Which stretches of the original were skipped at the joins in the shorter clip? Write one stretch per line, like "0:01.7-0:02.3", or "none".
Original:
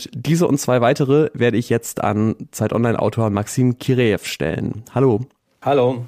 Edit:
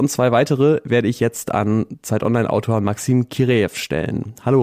none